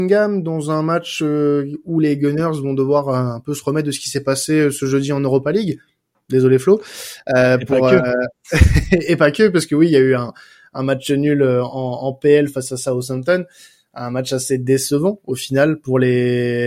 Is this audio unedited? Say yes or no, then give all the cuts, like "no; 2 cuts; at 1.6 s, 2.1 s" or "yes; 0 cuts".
yes; 0 cuts